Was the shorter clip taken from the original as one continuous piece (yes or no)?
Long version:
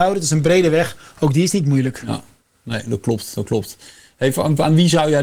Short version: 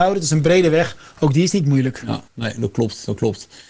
no